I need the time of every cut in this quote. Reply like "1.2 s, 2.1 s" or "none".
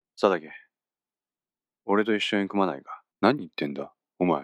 3.1 s